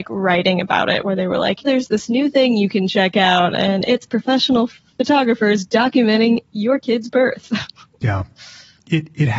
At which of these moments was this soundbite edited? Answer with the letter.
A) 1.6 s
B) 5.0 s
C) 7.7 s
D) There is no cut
A